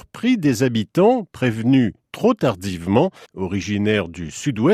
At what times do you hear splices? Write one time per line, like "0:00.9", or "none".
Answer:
0:03.2